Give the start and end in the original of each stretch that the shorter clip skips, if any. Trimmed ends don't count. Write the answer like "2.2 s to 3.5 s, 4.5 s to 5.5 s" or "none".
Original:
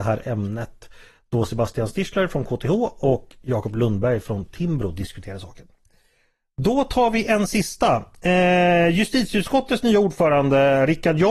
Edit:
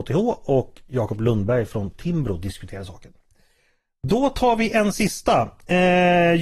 none